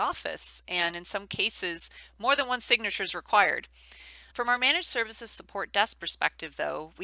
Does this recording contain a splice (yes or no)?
yes